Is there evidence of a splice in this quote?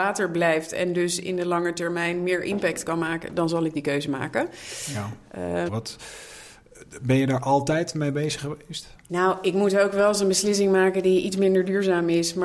yes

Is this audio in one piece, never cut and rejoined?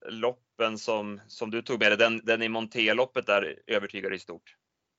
yes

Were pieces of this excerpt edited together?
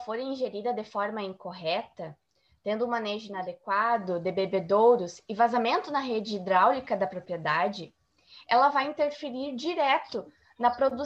no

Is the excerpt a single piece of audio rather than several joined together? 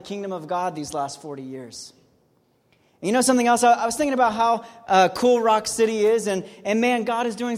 yes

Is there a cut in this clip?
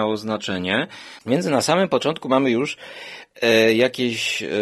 yes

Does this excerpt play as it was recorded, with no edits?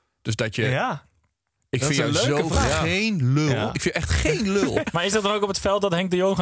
no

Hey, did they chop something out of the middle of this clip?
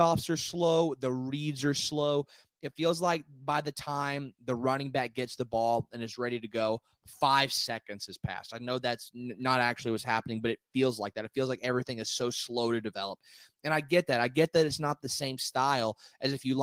no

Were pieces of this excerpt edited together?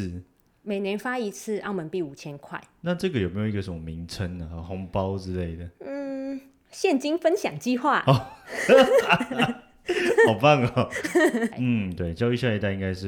yes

